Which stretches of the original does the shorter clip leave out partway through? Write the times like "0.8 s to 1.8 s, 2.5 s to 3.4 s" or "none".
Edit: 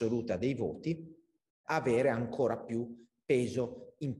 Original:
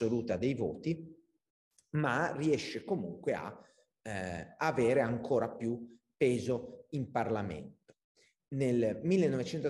1.6 s to 4.6 s